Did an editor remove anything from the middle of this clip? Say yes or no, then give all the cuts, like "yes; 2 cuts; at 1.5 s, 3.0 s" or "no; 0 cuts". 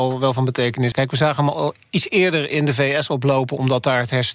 yes; 1 cut; at 0.9 s